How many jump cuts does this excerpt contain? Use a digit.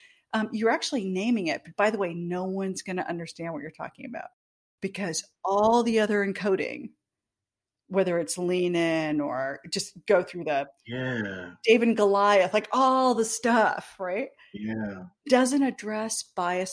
0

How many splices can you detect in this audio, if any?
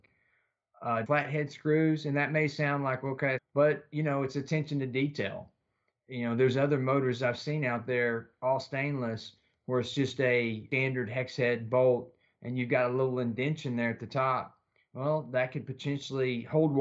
2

